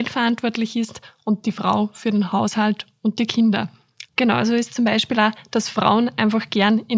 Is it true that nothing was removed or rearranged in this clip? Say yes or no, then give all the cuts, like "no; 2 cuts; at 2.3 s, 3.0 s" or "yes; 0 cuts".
no; 1 cut; at 4.1 s